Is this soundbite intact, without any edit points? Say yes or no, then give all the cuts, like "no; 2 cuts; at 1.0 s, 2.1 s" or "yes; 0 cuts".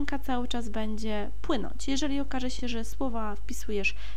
yes; 0 cuts